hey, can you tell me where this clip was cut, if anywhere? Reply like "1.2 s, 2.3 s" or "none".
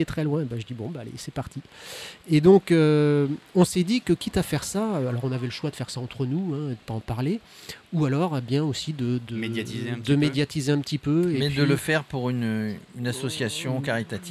9.3 s